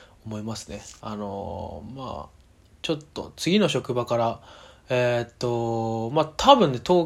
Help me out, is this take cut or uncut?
cut